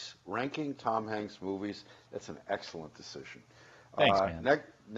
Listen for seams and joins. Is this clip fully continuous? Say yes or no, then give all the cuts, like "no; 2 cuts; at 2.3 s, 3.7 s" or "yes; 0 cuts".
yes; 0 cuts